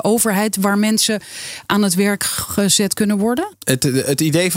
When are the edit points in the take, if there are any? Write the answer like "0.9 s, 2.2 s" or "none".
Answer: 3.5 s